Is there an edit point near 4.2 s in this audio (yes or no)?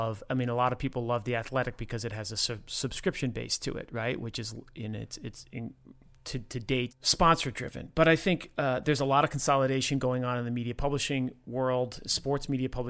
no